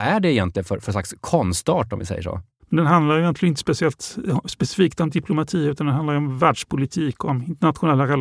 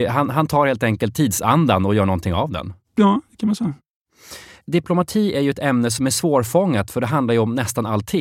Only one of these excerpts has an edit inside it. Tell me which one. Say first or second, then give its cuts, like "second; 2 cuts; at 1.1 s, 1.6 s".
first; 1 cut; at 2.6 s